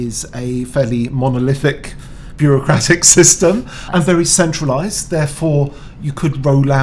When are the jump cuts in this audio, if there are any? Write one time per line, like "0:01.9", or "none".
0:03.9